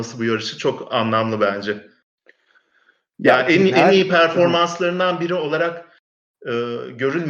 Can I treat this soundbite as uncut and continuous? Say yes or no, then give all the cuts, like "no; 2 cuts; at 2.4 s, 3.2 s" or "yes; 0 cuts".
yes; 0 cuts